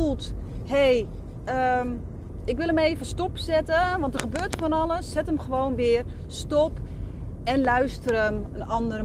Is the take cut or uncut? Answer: uncut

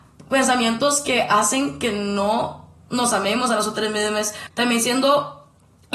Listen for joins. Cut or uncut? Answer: cut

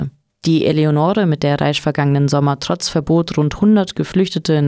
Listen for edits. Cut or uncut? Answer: uncut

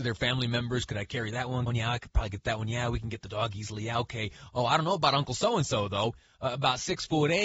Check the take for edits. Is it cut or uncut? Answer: cut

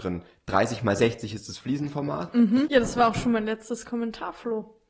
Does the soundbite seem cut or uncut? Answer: cut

